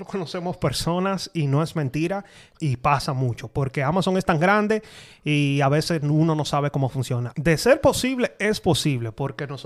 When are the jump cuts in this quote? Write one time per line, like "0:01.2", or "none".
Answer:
0:02.5
0:07.3